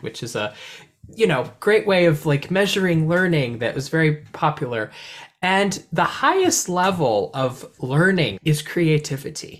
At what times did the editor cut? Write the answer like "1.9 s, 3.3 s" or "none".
8.4 s